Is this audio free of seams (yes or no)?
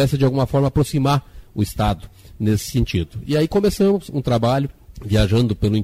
yes